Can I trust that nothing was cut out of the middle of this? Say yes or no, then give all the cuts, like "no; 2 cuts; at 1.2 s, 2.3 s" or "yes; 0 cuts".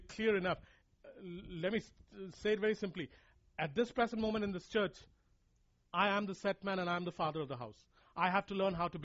yes; 0 cuts